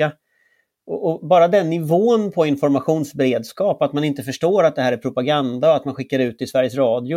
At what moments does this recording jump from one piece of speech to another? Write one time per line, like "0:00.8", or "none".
none

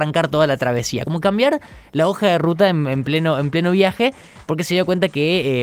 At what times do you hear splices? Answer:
none

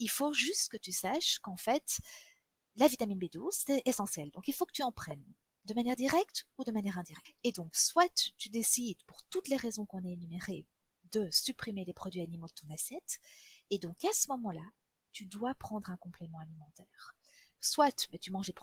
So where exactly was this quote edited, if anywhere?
none

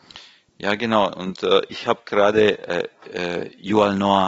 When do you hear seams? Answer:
none

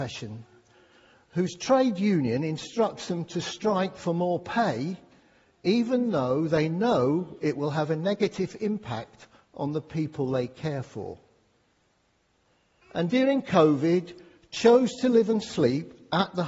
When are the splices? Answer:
0:12.8

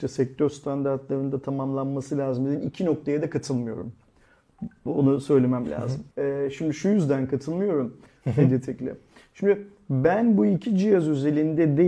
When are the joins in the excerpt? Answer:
0:06.1
0:08.1

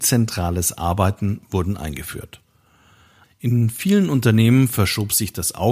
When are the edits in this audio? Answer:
0:03.2

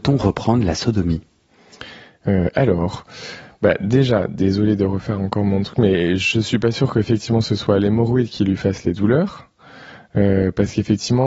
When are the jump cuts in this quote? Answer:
none

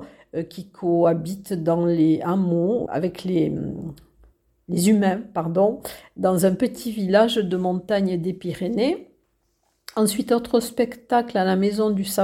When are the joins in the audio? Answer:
0:02.9

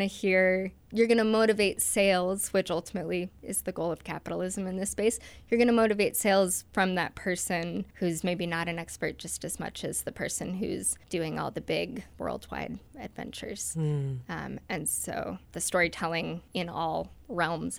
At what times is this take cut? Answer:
none

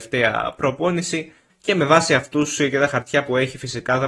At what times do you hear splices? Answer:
0:01.5

